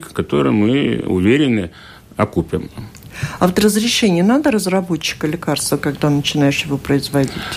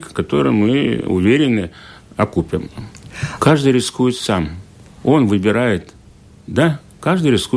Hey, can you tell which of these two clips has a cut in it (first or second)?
second